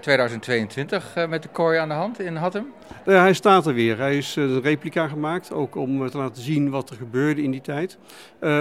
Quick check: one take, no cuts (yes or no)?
yes